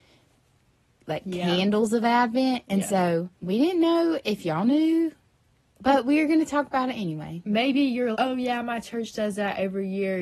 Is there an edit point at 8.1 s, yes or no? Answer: yes